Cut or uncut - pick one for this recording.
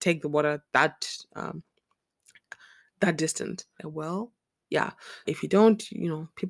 cut